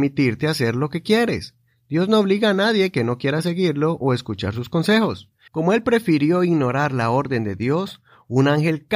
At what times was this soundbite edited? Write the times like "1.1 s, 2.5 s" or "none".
5.5 s